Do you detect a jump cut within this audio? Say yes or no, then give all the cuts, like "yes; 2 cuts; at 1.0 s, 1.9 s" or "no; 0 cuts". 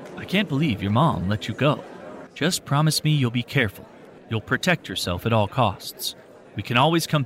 yes; 2 cuts; at 2.3 s, 4.2 s